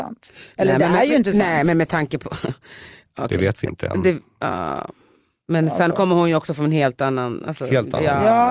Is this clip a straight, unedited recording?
yes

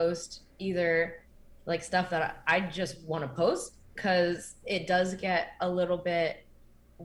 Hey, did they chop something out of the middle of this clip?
no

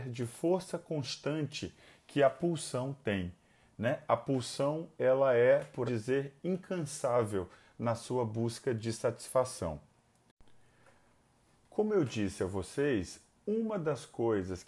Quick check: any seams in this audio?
yes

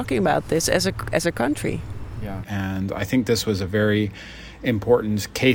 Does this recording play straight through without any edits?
no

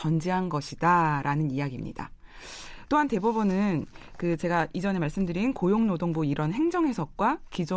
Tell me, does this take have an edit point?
no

